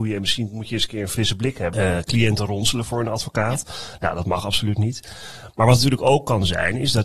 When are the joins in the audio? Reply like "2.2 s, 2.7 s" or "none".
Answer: 1.7 s